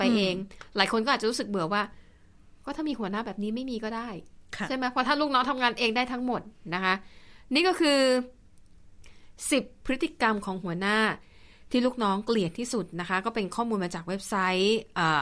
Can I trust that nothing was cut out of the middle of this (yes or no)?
yes